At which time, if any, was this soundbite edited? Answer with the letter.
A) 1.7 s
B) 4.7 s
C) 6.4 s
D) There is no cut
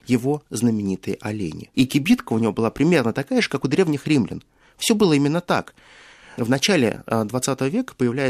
A